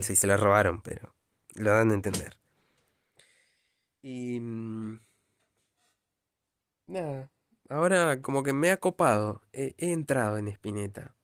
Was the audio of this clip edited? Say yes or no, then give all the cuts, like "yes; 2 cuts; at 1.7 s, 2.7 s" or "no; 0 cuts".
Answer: no; 0 cuts